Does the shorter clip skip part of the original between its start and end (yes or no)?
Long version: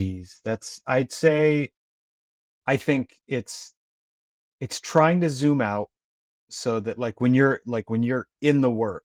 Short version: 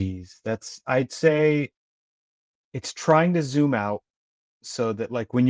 yes